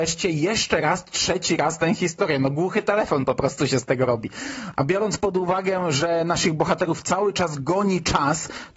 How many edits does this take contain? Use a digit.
0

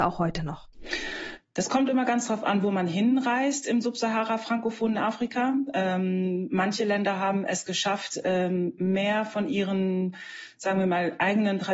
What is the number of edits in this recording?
0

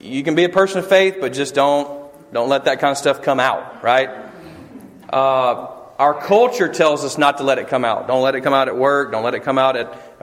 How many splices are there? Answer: 0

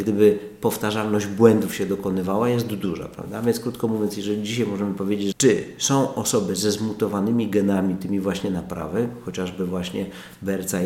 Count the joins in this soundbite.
1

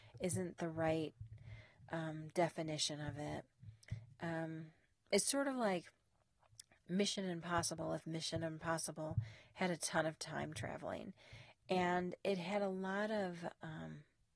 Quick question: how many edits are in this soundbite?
0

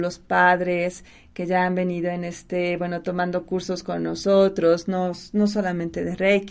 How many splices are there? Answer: 0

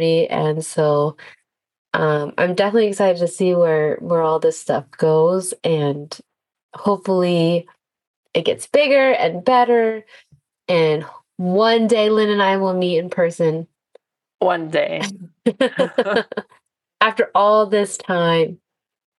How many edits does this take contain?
0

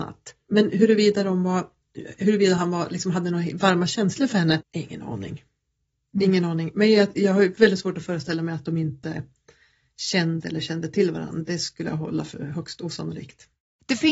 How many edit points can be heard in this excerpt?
1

